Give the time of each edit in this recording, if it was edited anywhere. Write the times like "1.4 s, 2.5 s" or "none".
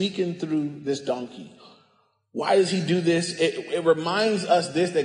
none